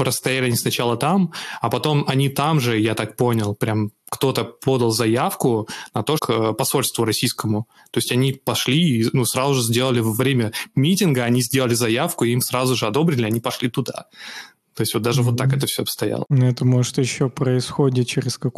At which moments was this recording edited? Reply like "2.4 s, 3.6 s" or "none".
6.2 s